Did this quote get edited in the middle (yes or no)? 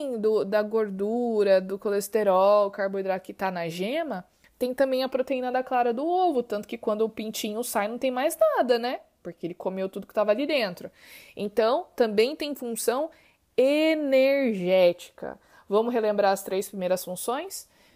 no